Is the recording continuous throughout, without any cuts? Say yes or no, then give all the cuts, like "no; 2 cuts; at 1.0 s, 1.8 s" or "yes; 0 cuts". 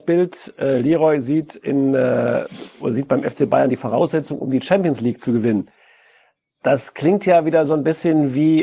yes; 0 cuts